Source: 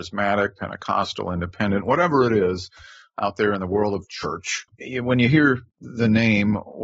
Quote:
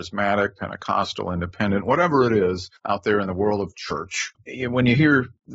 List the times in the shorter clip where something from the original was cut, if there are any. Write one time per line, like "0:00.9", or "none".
0:02.8